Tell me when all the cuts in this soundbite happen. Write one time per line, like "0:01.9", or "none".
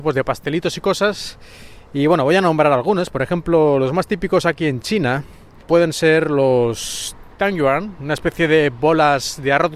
none